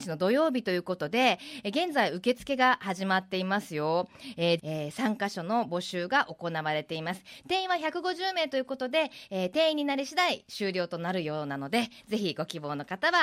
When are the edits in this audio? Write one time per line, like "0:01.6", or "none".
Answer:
0:04.6